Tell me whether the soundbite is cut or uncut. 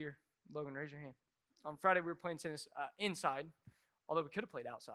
cut